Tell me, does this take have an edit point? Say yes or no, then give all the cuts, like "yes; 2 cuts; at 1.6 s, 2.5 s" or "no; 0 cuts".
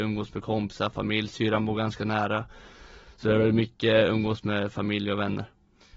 no; 0 cuts